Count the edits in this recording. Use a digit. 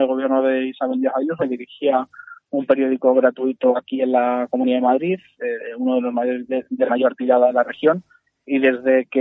1